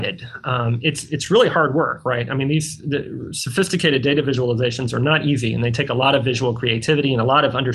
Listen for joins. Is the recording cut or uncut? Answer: uncut